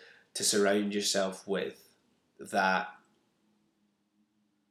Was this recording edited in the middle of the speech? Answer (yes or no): no